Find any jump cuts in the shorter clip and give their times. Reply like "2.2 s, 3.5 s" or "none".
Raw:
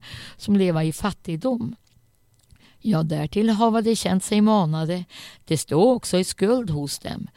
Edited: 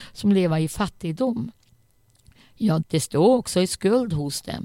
2.8 s